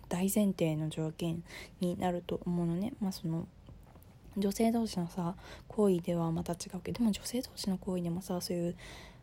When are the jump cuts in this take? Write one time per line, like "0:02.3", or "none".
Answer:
none